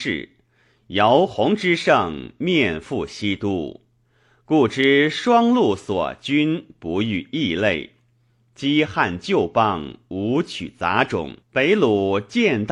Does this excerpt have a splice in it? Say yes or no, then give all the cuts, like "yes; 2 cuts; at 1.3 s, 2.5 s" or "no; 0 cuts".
yes; 1 cut; at 11.4 s